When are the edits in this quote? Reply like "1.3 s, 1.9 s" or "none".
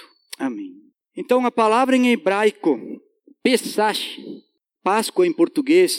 none